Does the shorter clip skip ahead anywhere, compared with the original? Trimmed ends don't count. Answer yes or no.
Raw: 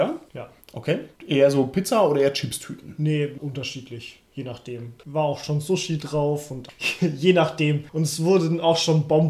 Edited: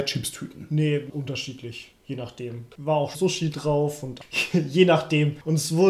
yes